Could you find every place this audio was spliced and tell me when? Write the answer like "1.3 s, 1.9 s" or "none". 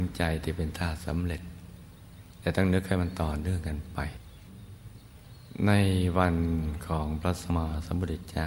7.5 s

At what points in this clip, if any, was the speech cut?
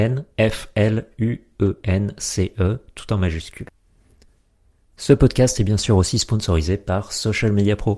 none

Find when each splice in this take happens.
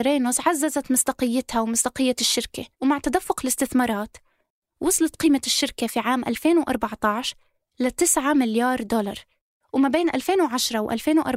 2.7 s

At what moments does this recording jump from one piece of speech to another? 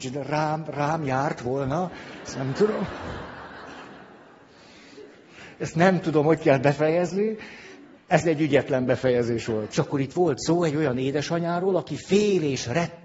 7.9 s, 9.7 s

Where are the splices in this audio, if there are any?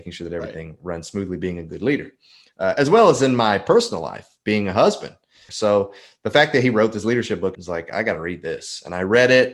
5.5 s, 7.5 s

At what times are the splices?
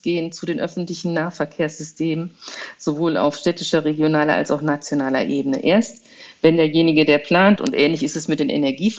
7.6 s

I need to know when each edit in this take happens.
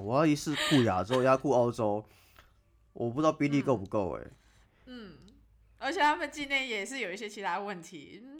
none

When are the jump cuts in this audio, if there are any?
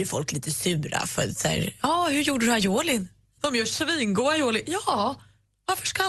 3.4 s

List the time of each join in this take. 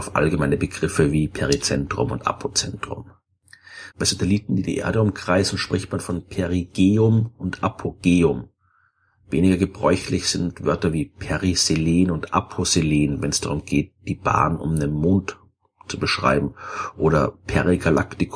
3.9 s

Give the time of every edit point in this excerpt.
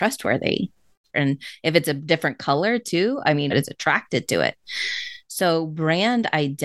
1.1 s, 3.5 s

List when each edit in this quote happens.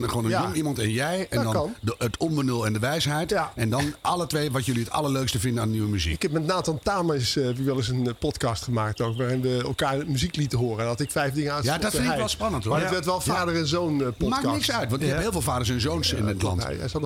none

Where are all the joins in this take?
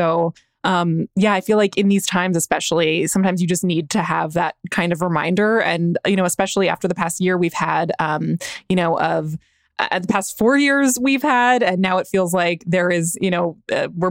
none

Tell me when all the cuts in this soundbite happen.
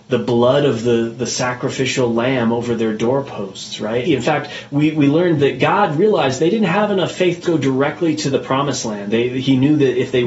4.1 s, 7.4 s

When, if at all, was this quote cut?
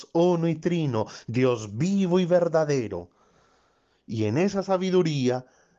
none

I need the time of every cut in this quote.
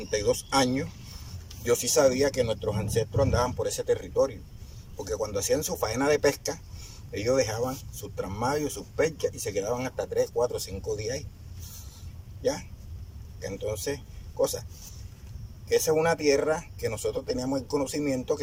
13.4 s

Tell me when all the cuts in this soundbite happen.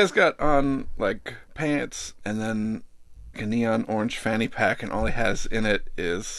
2.2 s, 3.3 s

